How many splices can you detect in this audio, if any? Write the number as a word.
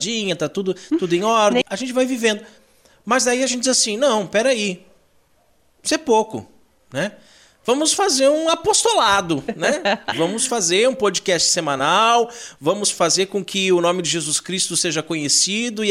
two